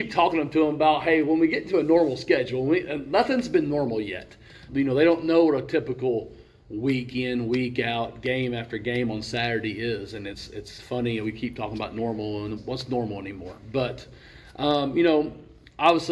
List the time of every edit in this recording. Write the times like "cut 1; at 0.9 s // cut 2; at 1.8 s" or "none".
cut 1; at 4.7 s // cut 2; at 12.6 s